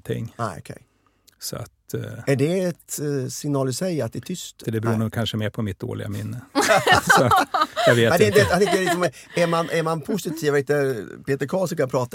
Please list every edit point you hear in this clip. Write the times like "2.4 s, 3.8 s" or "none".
4.6 s